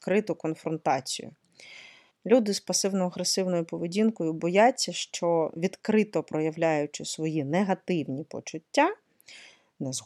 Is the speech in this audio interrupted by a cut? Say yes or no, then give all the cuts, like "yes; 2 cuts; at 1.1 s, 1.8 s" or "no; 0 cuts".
yes; 1 cut; at 2.1 s